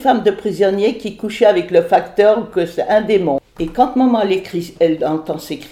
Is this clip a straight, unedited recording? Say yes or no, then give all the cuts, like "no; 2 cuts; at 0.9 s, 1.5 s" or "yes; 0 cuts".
yes; 0 cuts